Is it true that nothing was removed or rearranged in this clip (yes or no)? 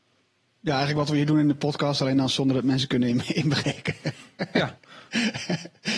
yes